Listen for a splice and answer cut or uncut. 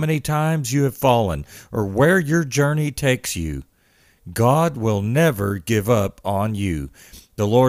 uncut